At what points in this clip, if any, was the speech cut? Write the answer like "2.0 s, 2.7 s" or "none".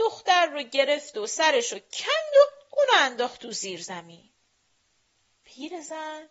none